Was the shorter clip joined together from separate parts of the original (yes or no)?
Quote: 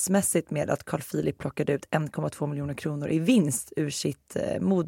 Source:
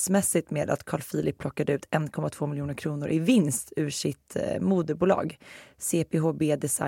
no